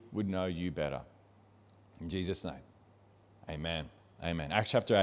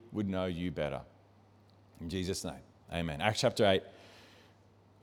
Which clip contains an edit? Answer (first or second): second